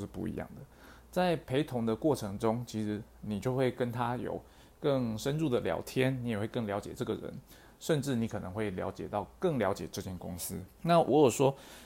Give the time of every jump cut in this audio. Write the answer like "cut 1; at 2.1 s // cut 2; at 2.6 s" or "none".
cut 1; at 10.7 s